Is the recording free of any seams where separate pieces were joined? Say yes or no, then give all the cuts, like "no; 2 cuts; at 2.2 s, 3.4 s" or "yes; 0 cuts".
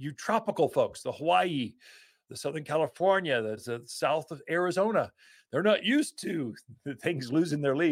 no; 1 cut; at 3.6 s